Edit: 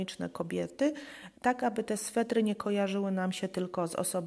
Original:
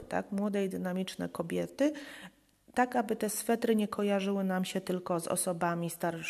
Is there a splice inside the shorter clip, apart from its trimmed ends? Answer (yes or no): yes